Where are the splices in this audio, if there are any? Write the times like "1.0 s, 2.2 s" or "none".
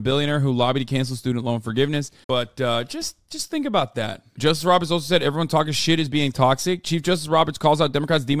2.2 s